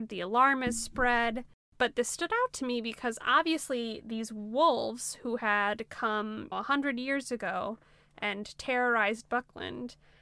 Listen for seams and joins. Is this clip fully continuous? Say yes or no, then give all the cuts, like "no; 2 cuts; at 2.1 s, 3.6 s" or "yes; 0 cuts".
no; 1 cut; at 6.5 s